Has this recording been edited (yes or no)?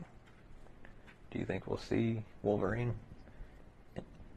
yes